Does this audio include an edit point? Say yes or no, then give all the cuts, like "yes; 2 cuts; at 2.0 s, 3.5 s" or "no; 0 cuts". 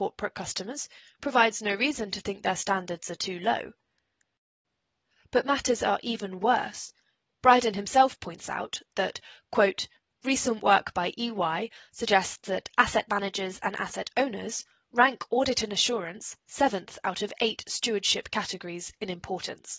no; 0 cuts